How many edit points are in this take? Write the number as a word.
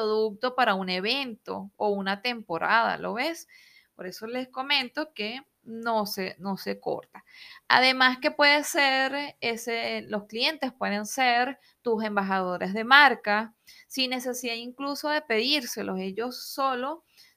zero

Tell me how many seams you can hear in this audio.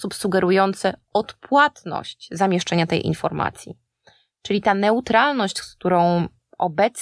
zero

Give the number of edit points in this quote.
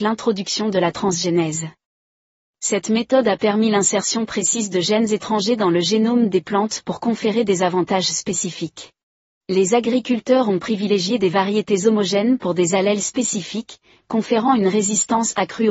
one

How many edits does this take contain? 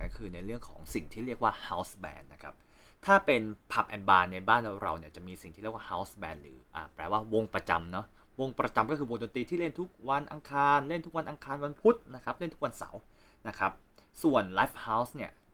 one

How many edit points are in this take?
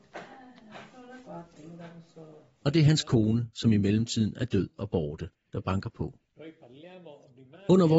one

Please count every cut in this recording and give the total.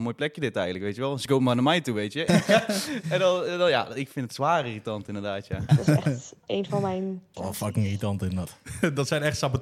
three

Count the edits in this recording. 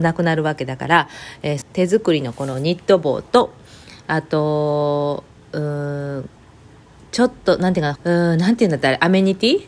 two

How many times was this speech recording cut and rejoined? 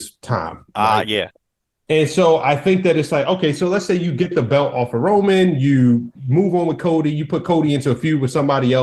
zero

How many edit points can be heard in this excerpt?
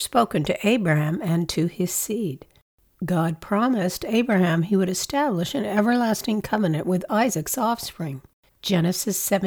one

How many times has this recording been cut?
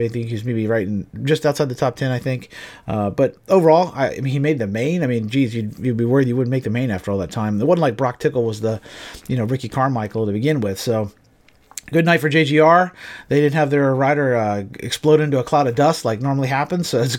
zero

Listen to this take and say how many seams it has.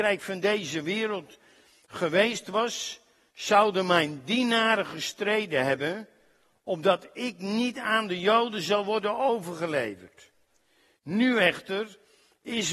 zero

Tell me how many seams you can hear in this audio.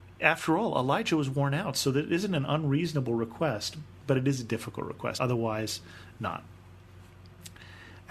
one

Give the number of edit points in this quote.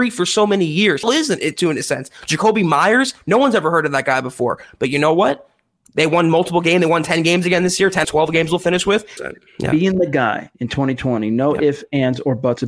three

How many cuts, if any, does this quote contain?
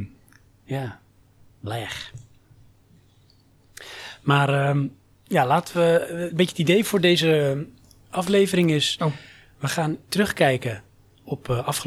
one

